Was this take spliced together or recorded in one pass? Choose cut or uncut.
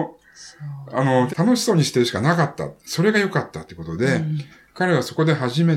cut